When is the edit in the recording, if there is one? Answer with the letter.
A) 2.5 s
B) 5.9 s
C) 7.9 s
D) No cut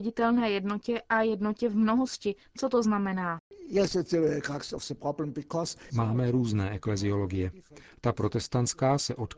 B